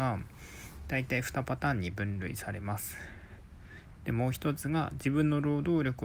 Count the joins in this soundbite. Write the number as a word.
one